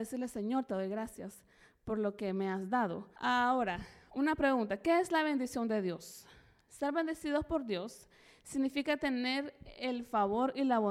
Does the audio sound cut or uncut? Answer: cut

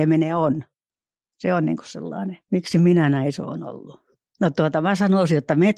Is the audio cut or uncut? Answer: cut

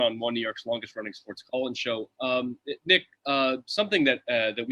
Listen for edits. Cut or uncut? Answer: uncut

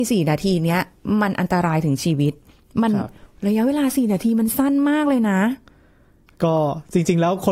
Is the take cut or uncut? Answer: uncut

